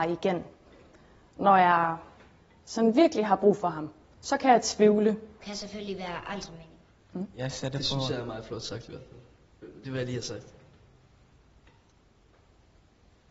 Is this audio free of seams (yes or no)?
no